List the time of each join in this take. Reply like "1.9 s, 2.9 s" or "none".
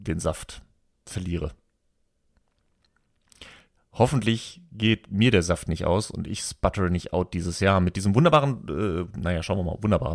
none